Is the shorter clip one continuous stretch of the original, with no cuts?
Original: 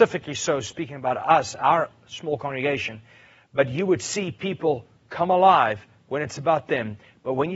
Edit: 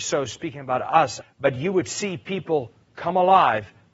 no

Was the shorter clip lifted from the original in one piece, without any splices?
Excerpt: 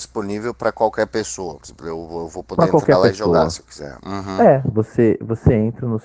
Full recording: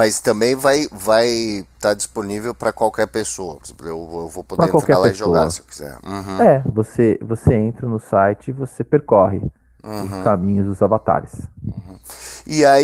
yes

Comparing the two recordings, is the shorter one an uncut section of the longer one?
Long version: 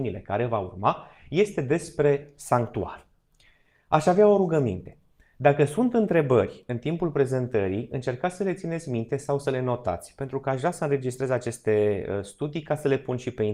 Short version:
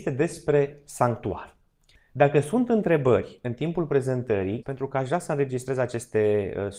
no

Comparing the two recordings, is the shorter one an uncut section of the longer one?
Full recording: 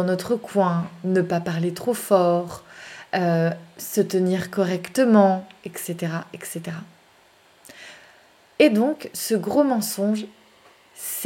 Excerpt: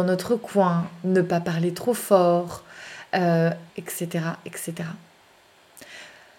no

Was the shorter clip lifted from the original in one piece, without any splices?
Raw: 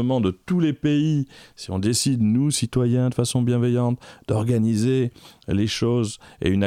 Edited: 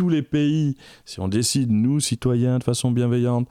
yes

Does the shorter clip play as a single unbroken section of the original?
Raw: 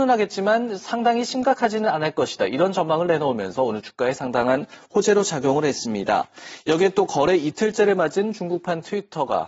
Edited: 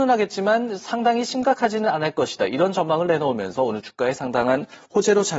yes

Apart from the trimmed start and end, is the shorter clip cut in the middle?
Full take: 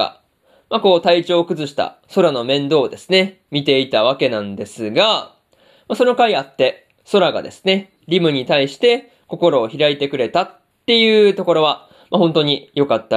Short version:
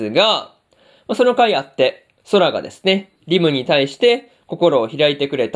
no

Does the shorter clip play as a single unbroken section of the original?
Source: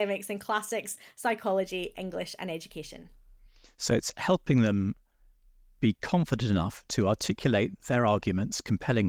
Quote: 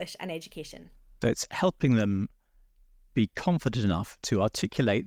no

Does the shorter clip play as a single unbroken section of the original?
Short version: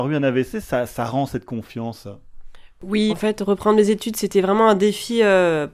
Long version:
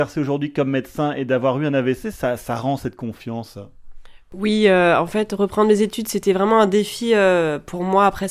no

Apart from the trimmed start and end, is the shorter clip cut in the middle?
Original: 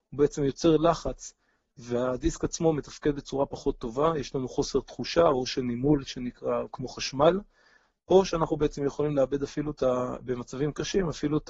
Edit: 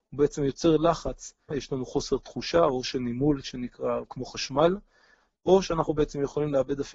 yes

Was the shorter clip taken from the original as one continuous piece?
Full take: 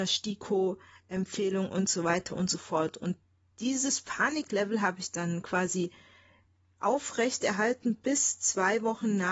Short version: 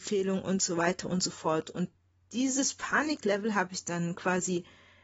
yes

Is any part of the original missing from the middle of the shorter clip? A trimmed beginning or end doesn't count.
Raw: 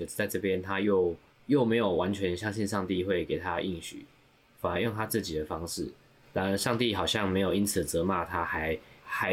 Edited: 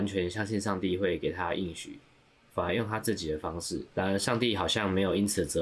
yes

